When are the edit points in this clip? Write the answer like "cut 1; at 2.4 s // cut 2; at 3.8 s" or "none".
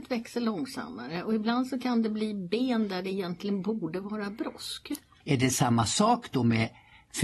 cut 1; at 5.2 s